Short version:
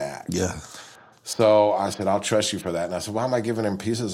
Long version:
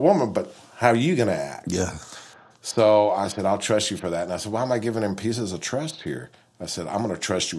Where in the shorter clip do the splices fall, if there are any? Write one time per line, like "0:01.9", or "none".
none